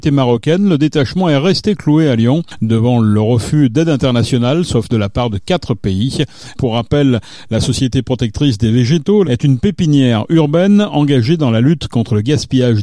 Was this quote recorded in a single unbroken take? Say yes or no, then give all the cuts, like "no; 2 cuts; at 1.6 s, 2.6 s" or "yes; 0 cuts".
no; 2 cuts; at 6.5 s, 9.2 s